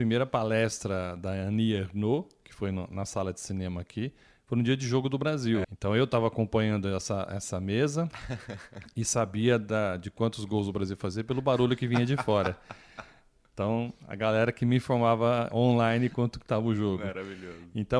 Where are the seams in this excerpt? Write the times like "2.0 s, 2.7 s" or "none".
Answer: 5.6 s